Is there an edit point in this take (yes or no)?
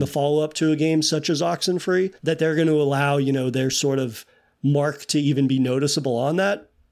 yes